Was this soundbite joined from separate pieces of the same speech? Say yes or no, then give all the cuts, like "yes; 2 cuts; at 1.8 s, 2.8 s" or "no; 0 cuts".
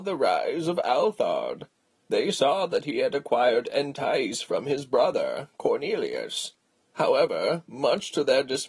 no; 0 cuts